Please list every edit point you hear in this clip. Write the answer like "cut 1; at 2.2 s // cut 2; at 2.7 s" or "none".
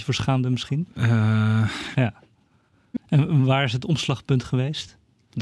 cut 1; at 1.9 s // cut 2; at 3.0 s

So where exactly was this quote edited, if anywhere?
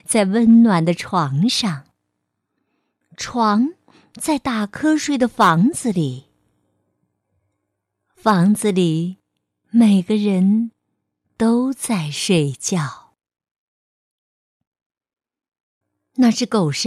none

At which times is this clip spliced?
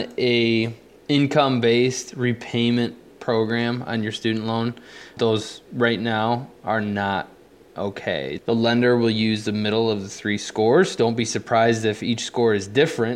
cut 1; at 5.2 s // cut 2; at 8.4 s

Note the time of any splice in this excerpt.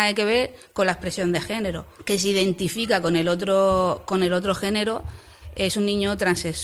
cut 1; at 1.9 s

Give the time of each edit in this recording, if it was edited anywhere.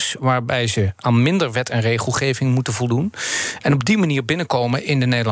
none

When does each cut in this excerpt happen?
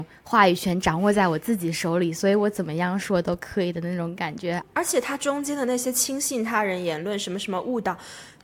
cut 1; at 4.6 s

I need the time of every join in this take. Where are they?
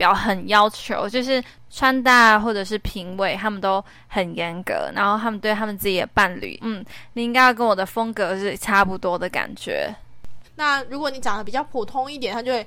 cut 1; at 6.6 s // cut 2; at 10.4 s

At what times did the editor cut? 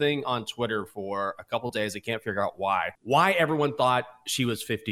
cut 1; at 2.9 s

